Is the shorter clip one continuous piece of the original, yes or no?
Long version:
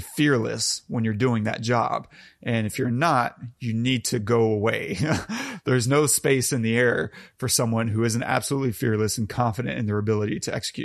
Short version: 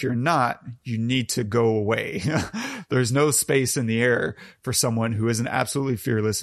yes